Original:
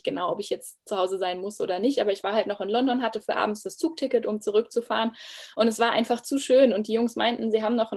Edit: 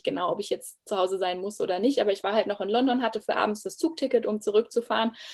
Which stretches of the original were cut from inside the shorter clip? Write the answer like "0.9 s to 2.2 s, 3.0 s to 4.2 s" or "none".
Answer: none